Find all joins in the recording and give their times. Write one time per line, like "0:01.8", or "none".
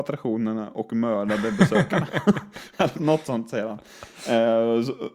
0:02.9